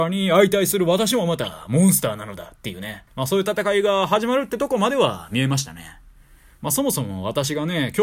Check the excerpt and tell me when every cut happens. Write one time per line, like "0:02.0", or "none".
0:03.1

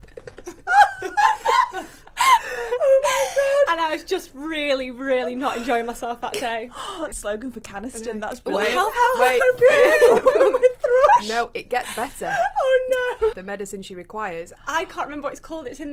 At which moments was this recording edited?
0:07.1
0:13.3
0:14.6

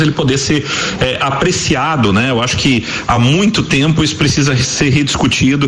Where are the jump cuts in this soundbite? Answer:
none

